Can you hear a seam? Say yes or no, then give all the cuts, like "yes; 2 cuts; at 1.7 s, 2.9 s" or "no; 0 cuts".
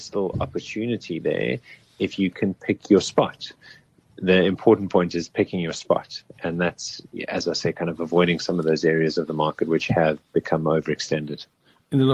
no; 0 cuts